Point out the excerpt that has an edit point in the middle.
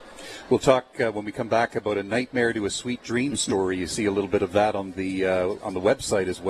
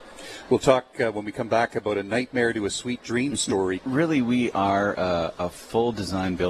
second; 1 cut; at 3.8 s

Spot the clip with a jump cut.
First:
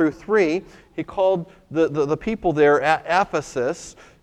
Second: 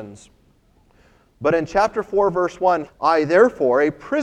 second; 1 cut; at 2.9 s

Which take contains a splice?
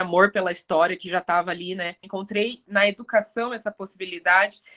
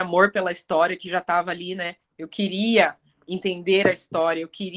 first; 1 cut; at 2.0 s

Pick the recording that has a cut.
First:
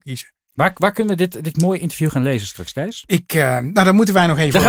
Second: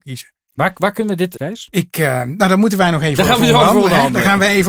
second; 1 cut; at 1.4 s

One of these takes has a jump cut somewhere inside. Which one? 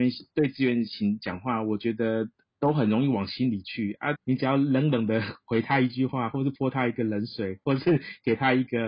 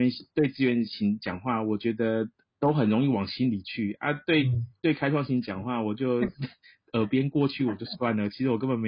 first; 1 cut; at 4.1 s

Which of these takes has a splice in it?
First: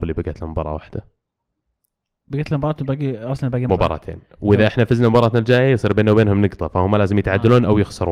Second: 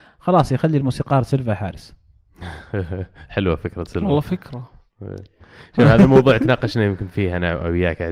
first; 1 cut; at 3.7 s

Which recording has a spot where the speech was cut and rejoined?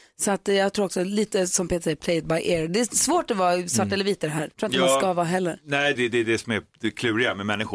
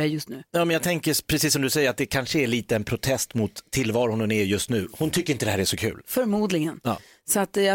first; 2 cuts; at 4.5 s, 5.9 s

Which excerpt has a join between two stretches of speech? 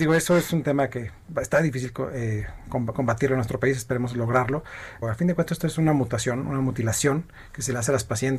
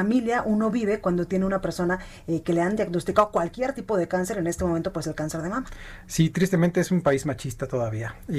first; 1 cut; at 5.0 s

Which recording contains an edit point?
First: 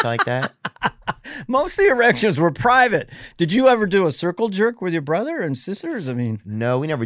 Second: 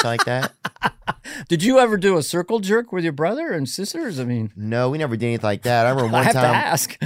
second; 1 cut; at 1.4 s

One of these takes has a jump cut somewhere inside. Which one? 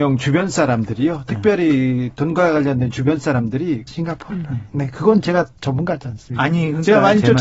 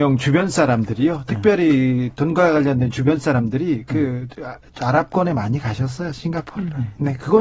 first; 1 cut; at 3.9 s

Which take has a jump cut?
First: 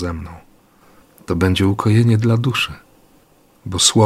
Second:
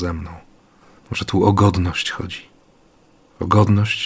second; 1 cut; at 1.0 s

